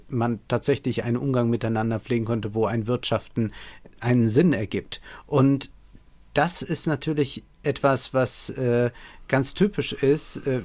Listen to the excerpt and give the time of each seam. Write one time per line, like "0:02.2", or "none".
none